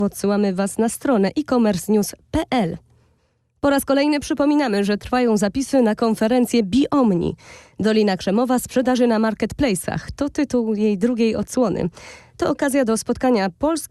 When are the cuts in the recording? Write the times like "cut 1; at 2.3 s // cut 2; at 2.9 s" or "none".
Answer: none